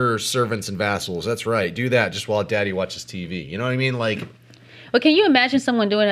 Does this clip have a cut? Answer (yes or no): no